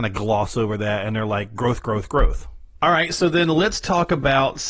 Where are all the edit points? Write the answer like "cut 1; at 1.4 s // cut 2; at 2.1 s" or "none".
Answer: cut 1; at 2.8 s